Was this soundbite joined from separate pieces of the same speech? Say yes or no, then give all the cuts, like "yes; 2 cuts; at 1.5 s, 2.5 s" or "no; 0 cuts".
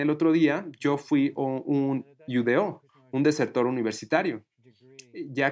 no; 0 cuts